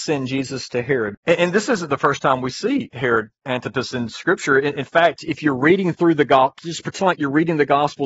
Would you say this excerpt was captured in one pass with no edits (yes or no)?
no